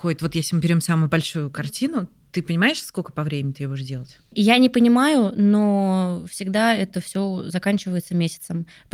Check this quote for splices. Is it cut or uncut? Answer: uncut